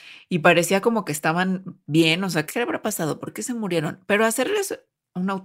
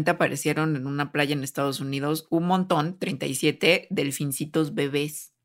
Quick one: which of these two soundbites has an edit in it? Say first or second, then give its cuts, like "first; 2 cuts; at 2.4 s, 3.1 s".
first; 1 cut; at 2.5 s